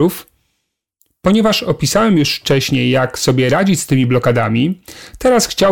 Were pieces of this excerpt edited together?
no; 0 cuts

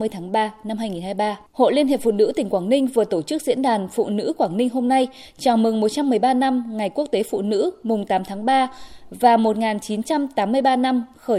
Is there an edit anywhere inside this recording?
yes; 1 cut; at 1.5 s

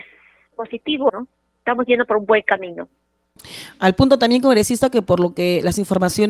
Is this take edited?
yes; 1 cut; at 1.1 s

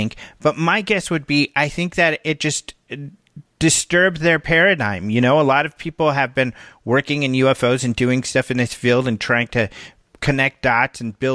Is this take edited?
no; 0 cuts

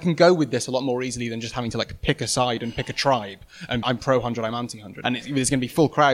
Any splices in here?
yes; 2 cuts; at 3.8 s, 5.0 s

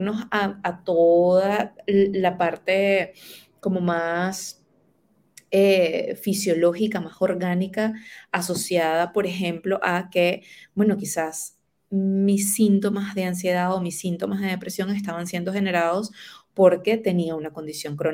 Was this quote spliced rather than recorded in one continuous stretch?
no; 0 cuts

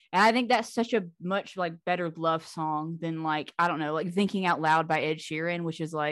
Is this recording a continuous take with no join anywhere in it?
yes; 0 cuts

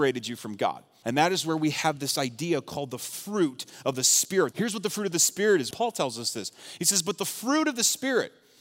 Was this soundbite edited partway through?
yes; 3 cuts; at 1.0 s, 4.5 s, 5.7 s

